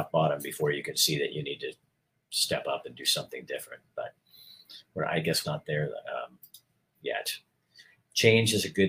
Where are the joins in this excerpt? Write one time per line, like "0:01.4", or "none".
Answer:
0:05.4